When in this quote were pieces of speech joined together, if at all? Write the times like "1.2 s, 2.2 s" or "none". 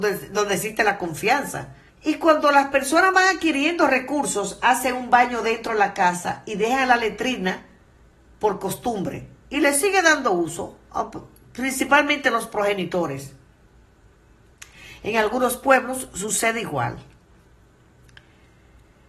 1.9 s